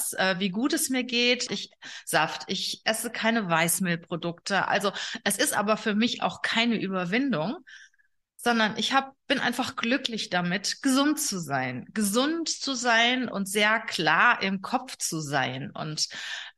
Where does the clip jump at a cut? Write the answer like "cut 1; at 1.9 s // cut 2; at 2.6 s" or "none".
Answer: cut 1; at 1.5 s